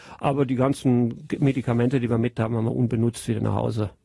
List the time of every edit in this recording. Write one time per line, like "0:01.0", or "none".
none